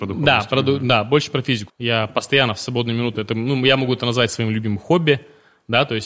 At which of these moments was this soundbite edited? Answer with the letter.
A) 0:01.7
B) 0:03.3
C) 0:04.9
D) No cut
A